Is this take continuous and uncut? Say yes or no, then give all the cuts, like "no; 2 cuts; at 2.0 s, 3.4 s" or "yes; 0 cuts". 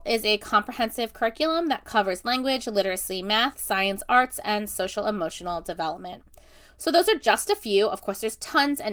yes; 0 cuts